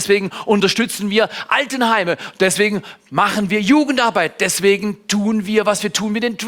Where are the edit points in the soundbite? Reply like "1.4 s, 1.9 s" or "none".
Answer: none